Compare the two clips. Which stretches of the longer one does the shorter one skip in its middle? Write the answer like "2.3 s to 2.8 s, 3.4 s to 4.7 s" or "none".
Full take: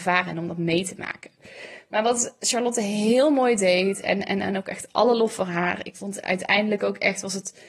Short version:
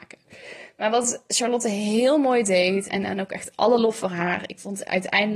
4.0 s to 4.3 s